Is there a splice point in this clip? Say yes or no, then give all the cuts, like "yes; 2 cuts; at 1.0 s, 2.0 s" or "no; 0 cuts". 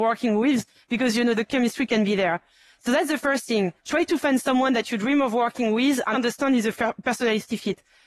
yes; 2 cuts; at 3.8 s, 6.1 s